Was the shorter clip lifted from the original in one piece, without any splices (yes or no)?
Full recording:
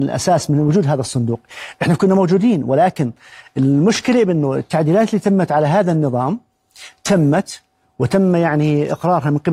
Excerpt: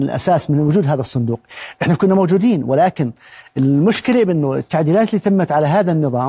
yes